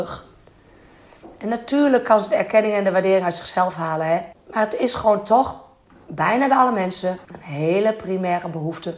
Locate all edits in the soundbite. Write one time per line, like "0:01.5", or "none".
0:04.3
0:07.2